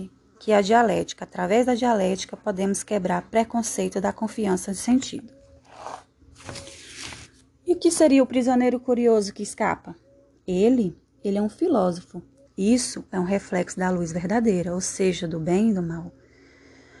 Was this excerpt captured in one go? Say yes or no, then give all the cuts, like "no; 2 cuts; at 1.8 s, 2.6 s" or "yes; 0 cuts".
no; 1 cut; at 12.5 s